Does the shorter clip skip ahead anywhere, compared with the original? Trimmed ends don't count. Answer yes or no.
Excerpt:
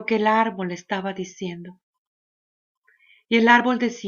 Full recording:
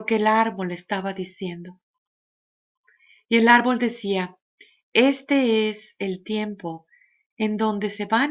no